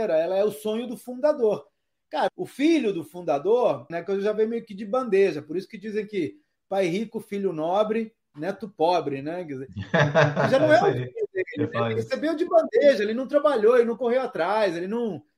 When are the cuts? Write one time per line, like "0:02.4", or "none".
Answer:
0:02.3
0:03.9